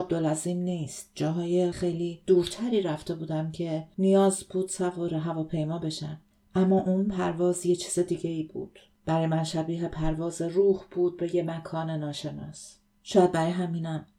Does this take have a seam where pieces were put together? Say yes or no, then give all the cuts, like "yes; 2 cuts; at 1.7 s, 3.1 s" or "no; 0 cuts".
yes; 1 cut; at 1.7 s